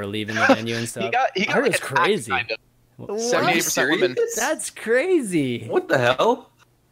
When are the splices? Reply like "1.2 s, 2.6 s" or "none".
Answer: 3.1 s